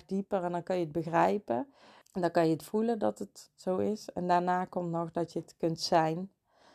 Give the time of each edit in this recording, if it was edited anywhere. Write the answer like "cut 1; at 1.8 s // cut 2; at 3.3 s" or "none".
cut 1; at 2.0 s